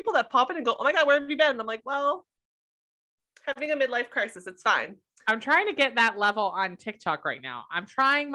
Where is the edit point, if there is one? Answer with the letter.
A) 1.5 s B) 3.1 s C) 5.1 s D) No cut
D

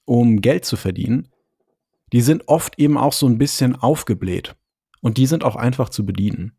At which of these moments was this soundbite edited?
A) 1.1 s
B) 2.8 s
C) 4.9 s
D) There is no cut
C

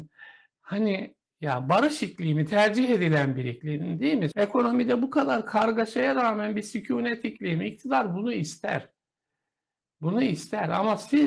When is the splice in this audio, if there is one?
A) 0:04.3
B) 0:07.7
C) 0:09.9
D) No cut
A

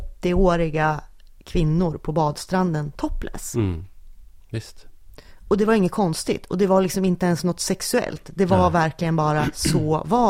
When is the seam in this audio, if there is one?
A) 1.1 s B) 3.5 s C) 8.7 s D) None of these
D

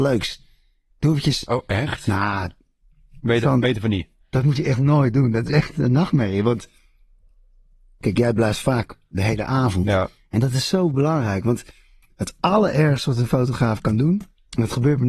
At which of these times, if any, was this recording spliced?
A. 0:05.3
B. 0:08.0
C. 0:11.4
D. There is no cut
B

